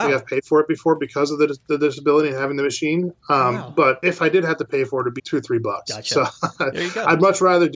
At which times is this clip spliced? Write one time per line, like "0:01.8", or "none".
0:05.2